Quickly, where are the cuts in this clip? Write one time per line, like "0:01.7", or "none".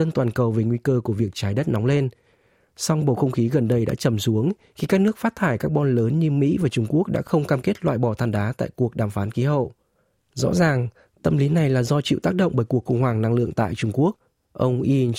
none